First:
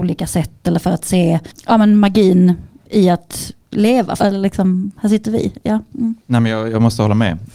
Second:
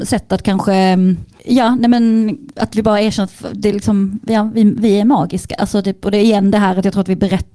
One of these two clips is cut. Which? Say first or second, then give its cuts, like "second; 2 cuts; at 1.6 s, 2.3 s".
first; 1 cut; at 4.2 s